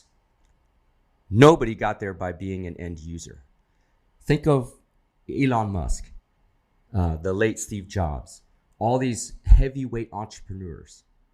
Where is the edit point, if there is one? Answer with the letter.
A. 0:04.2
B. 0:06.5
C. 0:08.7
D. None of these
A